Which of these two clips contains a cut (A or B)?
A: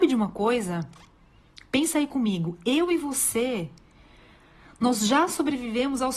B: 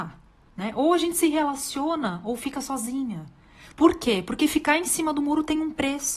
B